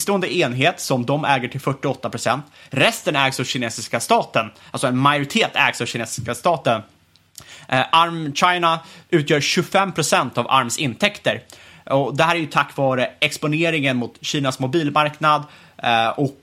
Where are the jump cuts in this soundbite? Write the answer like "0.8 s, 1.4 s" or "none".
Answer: none